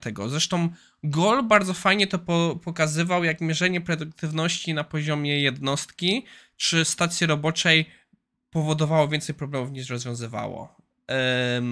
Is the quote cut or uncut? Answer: uncut